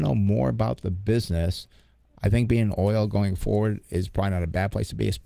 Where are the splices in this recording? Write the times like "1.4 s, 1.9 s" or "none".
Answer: 2.2 s